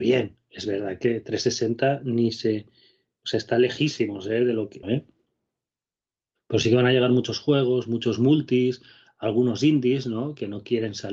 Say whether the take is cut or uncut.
cut